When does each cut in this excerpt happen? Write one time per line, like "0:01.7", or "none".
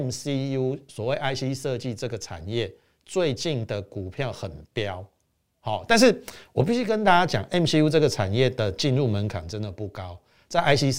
none

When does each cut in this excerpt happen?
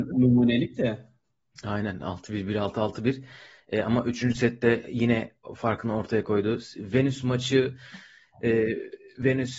none

